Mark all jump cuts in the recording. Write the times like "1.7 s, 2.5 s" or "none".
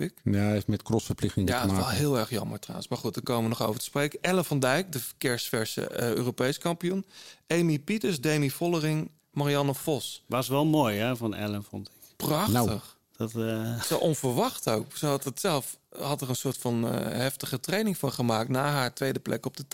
none